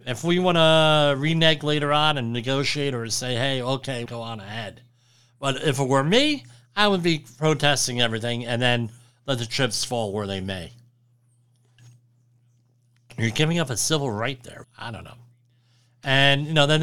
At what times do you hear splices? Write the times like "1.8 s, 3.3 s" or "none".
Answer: 4.1 s, 14.6 s